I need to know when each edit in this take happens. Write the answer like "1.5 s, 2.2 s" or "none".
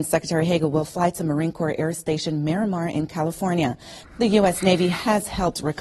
4.0 s